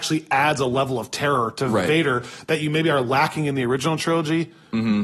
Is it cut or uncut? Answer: uncut